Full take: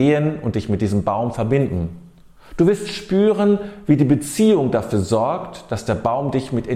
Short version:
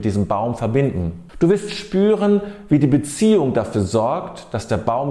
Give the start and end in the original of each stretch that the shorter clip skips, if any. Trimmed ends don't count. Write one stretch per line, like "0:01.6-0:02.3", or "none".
0:02.1-0:02.5